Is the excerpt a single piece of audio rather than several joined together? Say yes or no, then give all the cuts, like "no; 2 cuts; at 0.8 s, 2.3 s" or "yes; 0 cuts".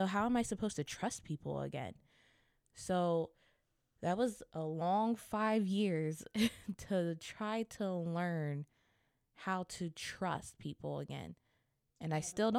yes; 0 cuts